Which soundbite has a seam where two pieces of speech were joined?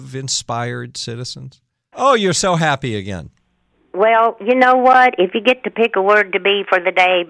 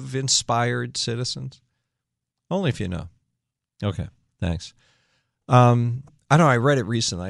first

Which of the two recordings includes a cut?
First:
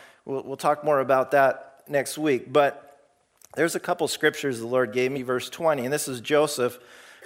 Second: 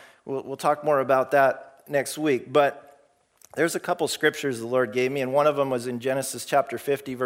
first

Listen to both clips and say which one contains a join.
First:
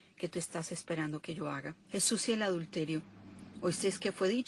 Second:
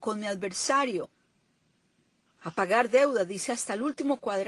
first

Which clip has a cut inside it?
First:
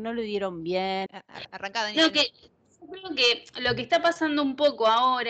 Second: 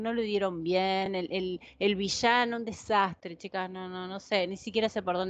first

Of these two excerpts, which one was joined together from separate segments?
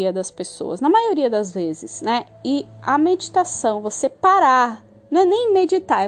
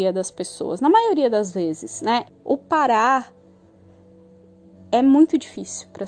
second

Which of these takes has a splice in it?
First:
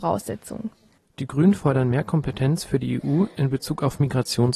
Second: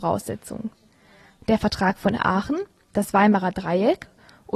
first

